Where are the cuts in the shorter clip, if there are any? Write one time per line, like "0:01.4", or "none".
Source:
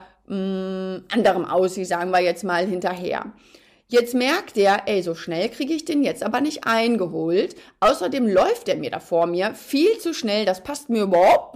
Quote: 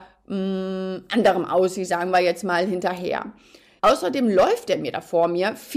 0:03.8